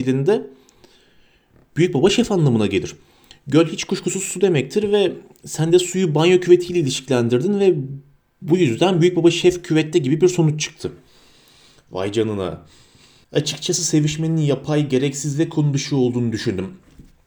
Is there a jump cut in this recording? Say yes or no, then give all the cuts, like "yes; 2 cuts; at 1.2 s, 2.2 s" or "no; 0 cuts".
yes; 1 cut; at 13.2 s